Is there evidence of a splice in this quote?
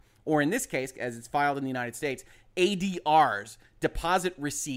no; 0 cuts

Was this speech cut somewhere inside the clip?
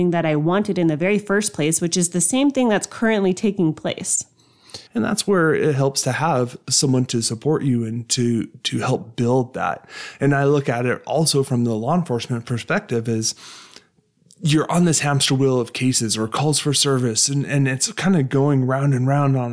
yes; 1 cut; at 4.9 s

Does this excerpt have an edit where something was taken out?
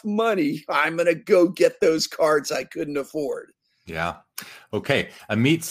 yes; 1 cut; at 3.9 s

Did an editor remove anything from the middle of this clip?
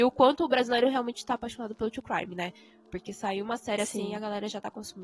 no; 0 cuts

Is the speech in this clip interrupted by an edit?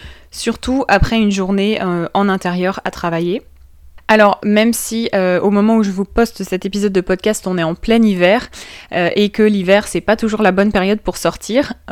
no; 0 cuts

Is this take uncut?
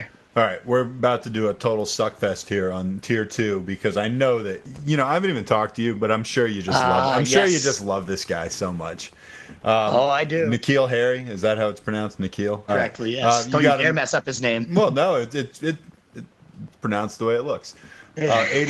no; 1 cut; at 12.7 s

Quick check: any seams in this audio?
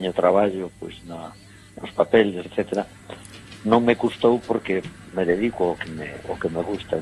yes; 1 cut; at 2.4 s

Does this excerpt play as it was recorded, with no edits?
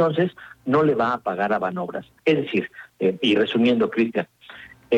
no; 1 cut; at 2.2 s

